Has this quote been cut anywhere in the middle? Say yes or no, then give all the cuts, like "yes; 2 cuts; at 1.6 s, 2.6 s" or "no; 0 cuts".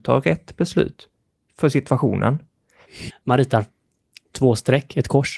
yes; 1 cut; at 3.1 s